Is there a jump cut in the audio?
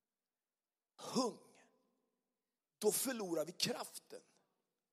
yes; 1 cut; at 2.6 s

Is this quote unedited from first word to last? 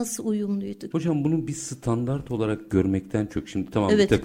no; 1 cut; at 0.9 s

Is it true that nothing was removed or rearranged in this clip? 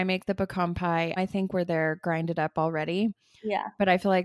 no; 1 cut; at 1.2 s

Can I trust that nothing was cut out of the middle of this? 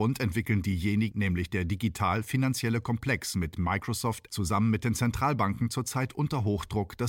no; 2 cuts; at 1.1 s, 4.3 s

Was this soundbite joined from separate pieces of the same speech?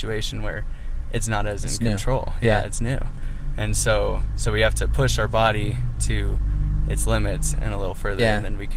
yes; 1 cut; at 7.5 s

